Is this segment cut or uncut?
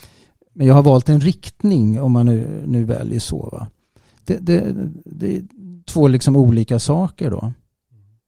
uncut